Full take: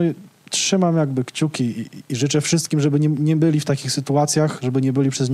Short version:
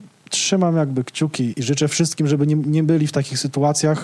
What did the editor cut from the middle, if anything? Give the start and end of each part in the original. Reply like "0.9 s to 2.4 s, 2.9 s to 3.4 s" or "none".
1.7 s to 2.1 s